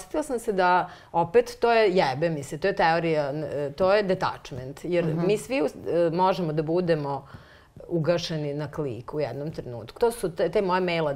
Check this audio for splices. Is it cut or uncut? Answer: cut